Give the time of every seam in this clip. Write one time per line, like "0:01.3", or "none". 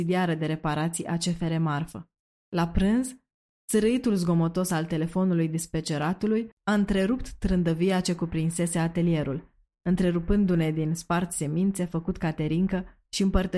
0:02.4